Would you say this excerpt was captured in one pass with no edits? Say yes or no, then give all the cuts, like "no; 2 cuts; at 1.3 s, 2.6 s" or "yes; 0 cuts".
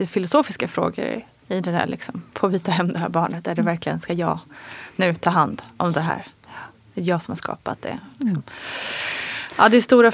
no; 1 cut; at 1.4 s